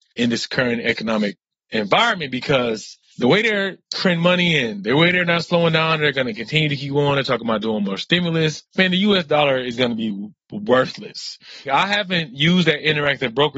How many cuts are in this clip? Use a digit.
1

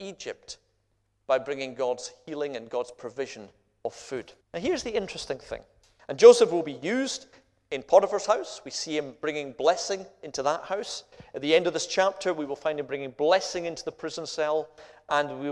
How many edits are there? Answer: 2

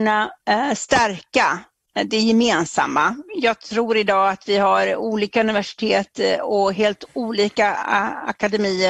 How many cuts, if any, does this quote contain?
1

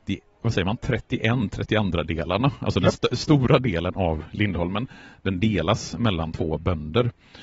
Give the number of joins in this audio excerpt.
0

